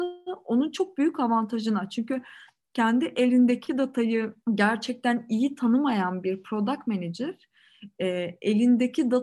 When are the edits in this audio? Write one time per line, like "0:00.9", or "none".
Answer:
0:04.4